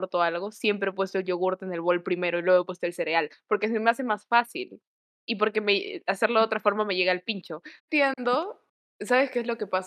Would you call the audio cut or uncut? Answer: cut